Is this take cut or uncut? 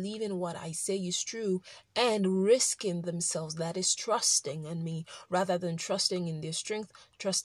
uncut